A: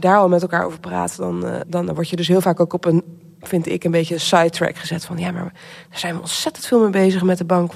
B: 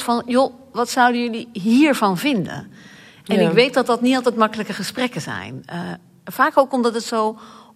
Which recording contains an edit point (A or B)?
A